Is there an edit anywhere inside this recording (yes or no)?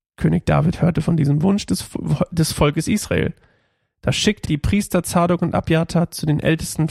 yes